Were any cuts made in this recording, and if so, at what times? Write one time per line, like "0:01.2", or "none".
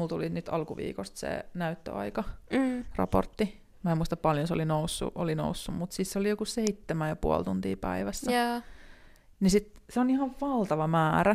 none